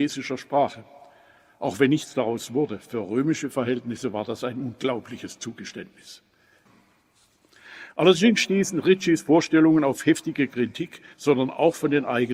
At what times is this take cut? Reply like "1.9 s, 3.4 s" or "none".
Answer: 11.1 s